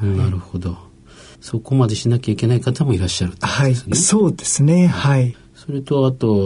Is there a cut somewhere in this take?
yes; 1 cut; at 3.9 s

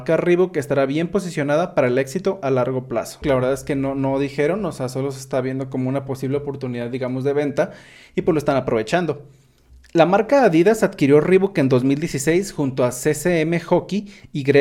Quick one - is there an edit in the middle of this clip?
yes; 1 cut; at 3.2 s

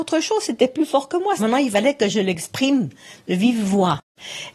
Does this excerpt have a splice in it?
yes; 1 cut; at 1.4 s

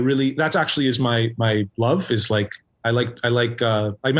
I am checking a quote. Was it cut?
no; 0 cuts

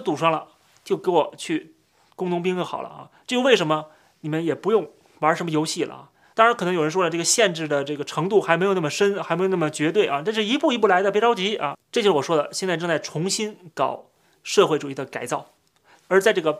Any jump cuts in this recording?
yes; 1 cut; at 6.3 s

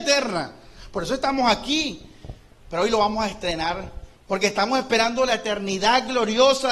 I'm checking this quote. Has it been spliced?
yes; 2 cuts; at 2.6 s, 4.1 s

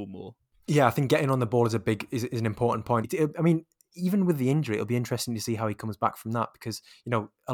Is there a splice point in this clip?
yes; 1 cut; at 3.0 s

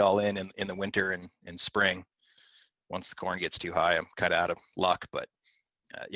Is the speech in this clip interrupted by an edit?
no; 0 cuts

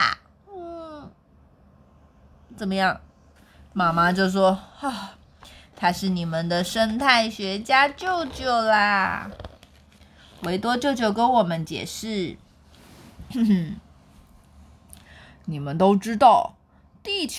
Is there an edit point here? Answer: no; 0 cuts

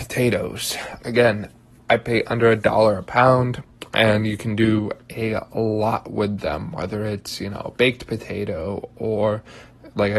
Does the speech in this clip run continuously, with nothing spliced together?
no; 1 cut; at 1.0 s

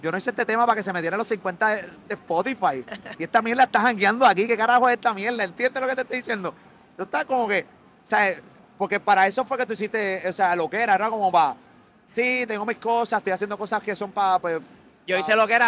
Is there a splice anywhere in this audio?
no; 0 cuts

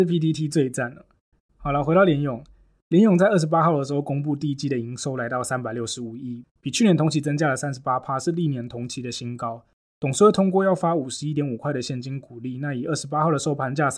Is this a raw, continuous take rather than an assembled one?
yes; 0 cuts

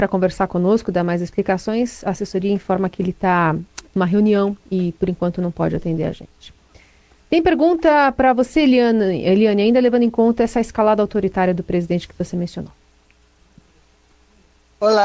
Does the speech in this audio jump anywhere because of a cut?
no; 0 cuts

